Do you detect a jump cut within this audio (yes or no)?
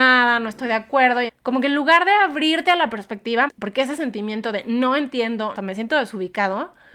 yes